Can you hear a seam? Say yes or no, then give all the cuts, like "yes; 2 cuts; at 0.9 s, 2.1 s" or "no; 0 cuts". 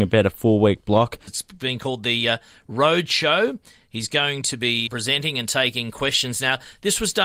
yes; 2 cuts; at 1.3 s, 4.9 s